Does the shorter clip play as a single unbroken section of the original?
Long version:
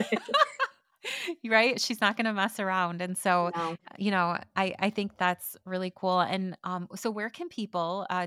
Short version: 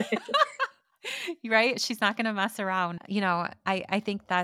no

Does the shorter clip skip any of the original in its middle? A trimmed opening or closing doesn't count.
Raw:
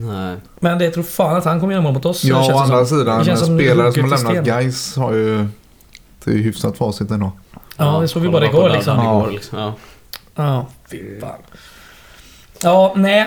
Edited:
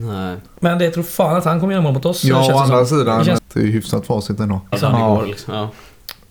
yes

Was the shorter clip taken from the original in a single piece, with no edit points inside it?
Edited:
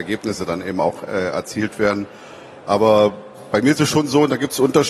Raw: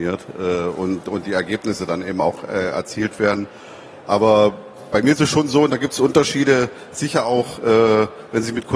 yes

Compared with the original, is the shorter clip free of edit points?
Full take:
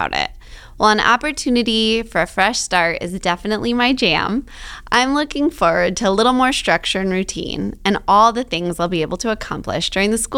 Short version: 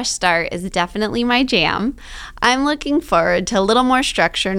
yes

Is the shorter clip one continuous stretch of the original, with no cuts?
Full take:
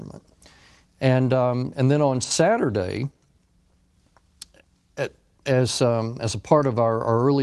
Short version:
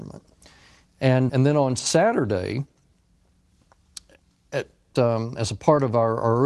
no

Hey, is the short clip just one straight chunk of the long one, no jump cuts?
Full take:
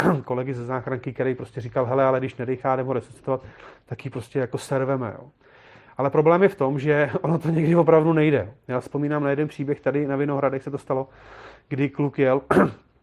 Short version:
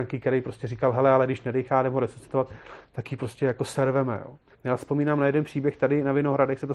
no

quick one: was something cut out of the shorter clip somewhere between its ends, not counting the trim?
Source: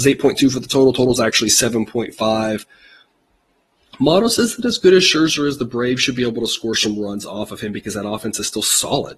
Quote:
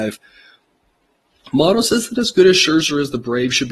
no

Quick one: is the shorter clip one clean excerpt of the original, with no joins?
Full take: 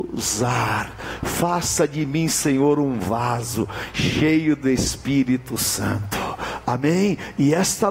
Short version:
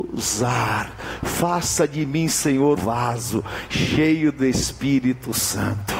no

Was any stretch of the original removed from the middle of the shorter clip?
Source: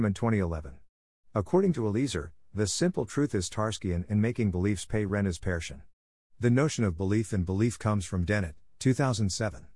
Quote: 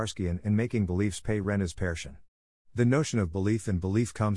no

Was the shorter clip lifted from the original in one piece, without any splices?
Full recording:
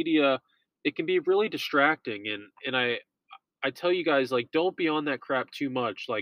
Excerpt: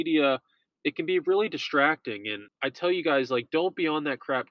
no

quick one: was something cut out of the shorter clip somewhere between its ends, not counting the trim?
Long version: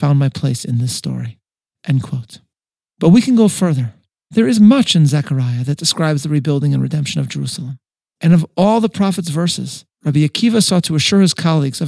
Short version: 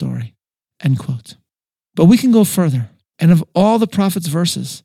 yes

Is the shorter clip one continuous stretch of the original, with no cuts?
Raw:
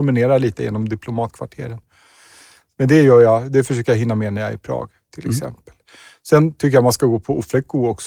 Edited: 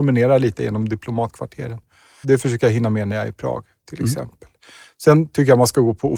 no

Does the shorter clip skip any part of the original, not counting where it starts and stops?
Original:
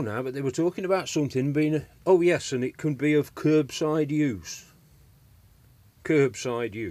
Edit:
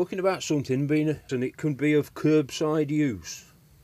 yes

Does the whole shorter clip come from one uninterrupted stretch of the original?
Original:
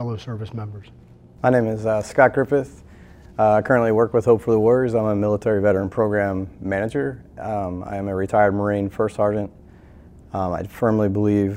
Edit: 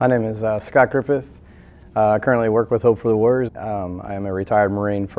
no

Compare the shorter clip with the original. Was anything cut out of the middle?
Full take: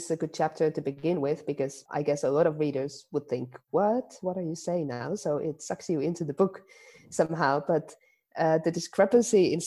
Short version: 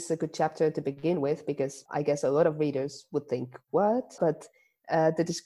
yes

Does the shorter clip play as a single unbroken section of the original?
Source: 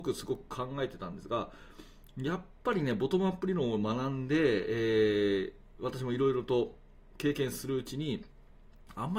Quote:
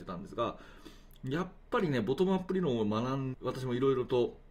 no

